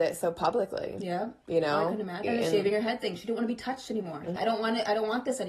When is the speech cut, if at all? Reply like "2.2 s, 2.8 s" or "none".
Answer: 2.2 s, 4.4 s